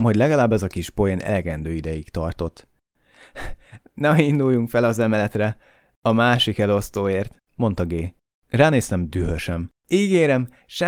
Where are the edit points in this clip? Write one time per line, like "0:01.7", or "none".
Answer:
none